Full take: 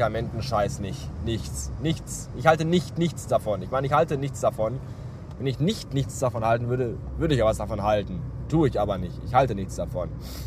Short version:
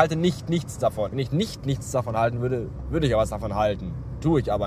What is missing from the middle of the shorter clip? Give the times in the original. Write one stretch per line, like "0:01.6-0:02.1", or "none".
0:03.6-0:05.4